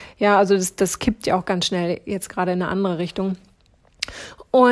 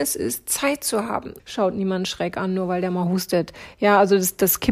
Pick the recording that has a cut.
second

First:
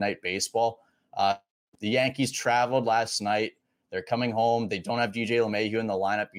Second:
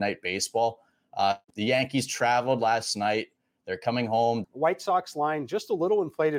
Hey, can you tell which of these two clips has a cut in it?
second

